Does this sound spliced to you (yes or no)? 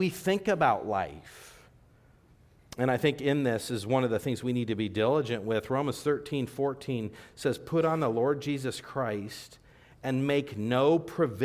no